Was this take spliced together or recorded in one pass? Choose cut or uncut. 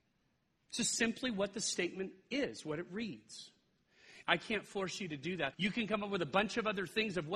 cut